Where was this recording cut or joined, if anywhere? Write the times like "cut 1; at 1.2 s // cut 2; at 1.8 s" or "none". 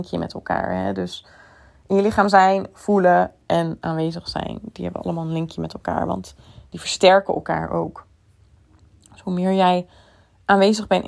none